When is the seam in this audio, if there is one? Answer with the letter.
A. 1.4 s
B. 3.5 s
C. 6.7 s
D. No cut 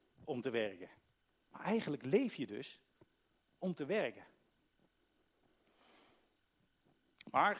A